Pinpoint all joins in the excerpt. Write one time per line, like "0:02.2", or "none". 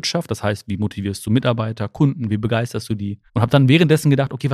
0:03.3